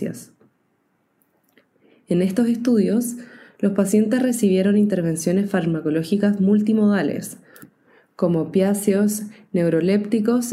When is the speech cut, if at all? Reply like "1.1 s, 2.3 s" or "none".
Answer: none